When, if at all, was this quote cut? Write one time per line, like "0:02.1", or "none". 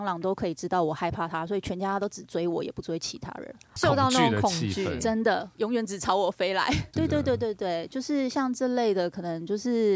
0:03.8
0:06.9